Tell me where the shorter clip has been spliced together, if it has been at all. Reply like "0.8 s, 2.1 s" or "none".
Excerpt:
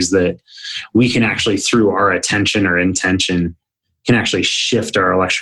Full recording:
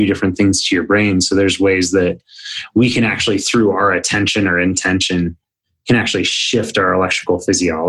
none

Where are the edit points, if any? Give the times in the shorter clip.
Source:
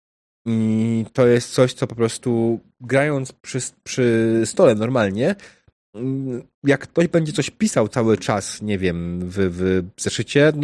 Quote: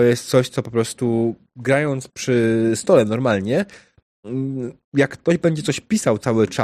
2.1 s

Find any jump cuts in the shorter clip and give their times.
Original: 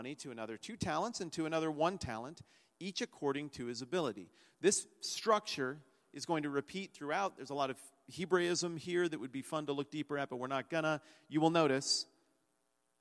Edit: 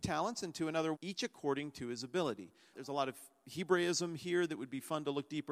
0.9 s, 2.7 s

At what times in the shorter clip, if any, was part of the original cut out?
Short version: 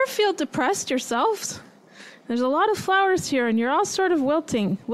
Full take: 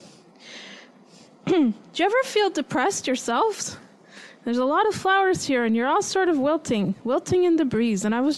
none

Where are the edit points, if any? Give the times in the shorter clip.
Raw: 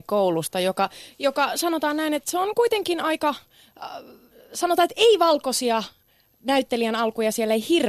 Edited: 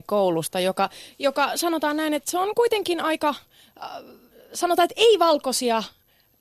none

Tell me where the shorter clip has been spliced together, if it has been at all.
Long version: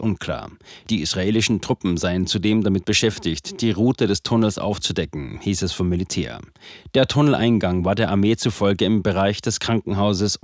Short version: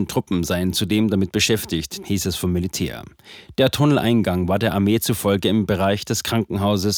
2.0 s

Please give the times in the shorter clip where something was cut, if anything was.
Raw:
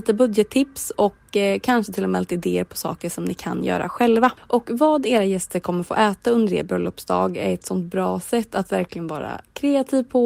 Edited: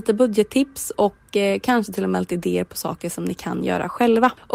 none

